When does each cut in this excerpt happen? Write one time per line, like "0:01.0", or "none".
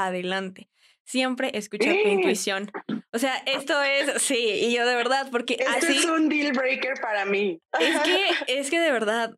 none